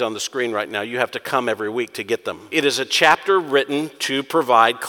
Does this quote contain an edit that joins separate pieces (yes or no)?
yes